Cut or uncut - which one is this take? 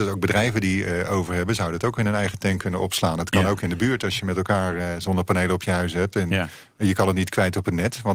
uncut